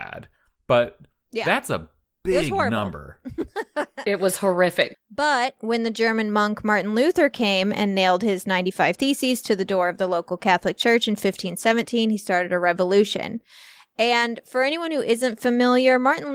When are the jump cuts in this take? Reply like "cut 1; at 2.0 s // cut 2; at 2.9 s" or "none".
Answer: cut 1; at 4.9 s